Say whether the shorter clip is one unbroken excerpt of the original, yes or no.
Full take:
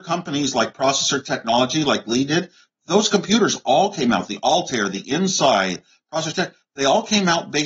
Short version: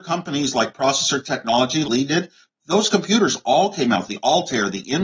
no